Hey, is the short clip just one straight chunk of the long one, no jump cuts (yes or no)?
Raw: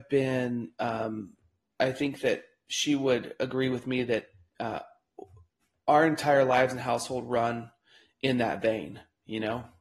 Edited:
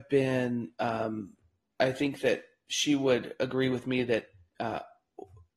yes